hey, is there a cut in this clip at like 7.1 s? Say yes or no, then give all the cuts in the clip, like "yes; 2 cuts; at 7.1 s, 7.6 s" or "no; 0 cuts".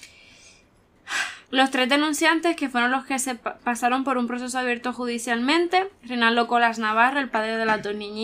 no; 1 cut; at 1.4 s